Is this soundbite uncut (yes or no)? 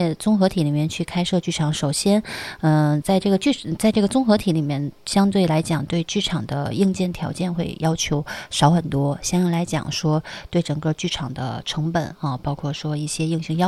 no